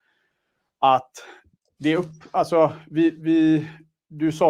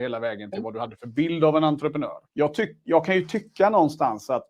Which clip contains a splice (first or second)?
second